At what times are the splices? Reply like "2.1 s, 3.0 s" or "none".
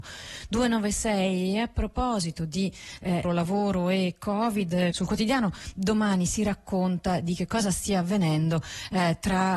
3.2 s, 4.9 s